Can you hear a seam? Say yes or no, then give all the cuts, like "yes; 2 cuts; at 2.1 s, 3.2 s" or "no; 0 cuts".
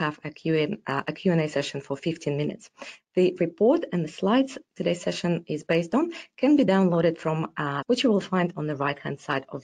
yes; 1 cut; at 7.8 s